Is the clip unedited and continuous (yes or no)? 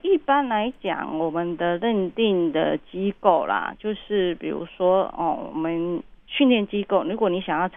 yes